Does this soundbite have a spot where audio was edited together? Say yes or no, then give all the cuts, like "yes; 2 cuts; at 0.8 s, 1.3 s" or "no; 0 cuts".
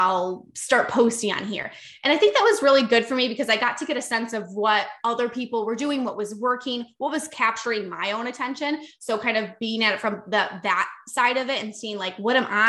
no; 0 cuts